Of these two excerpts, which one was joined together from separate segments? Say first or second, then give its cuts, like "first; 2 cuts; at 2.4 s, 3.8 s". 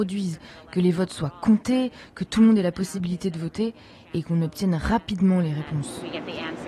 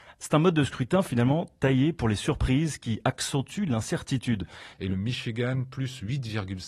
second; 1 cut; at 4.7 s